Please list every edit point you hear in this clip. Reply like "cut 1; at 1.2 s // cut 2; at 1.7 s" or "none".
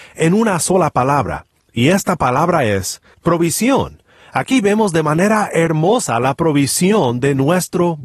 cut 1; at 3.1 s